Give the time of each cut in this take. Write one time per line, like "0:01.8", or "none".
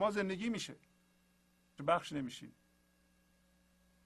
0:01.8